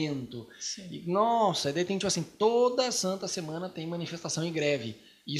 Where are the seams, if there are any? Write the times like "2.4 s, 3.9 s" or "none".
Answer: none